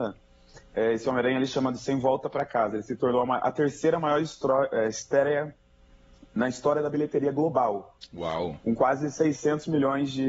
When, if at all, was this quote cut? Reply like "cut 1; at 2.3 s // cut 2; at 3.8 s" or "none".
none